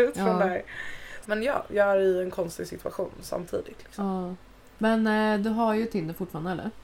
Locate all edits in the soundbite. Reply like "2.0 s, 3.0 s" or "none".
1.2 s